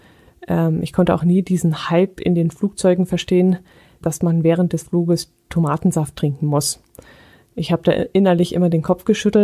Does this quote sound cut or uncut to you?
cut